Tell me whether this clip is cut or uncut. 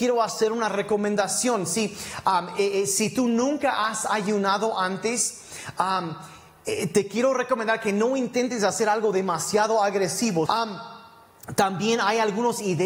cut